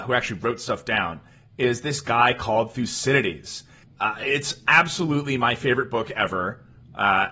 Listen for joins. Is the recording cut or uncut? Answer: cut